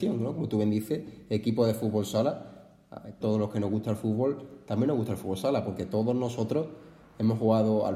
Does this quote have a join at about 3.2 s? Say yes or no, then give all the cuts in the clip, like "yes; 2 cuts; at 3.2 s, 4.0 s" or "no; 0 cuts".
yes; 1 cut; at 3.2 s